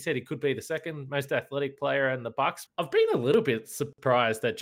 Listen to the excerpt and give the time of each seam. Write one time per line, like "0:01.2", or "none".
0:02.7